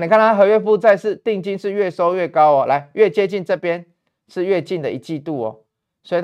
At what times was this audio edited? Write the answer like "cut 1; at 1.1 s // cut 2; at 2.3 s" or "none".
none